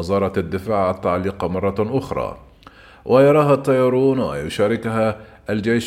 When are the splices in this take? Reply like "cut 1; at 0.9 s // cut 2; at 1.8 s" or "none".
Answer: none